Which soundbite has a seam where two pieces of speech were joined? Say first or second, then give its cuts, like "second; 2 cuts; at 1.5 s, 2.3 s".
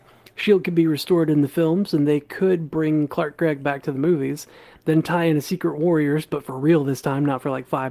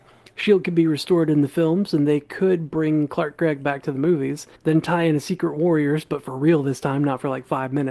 second; 1 cut; at 4.6 s